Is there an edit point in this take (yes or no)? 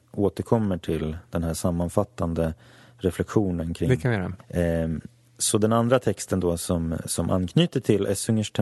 yes